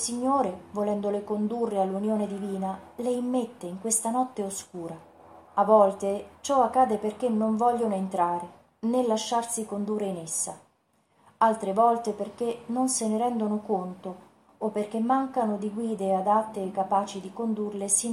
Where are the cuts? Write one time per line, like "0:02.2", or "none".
0:05.5